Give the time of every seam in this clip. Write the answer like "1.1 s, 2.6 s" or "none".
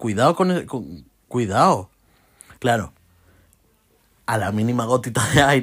2.5 s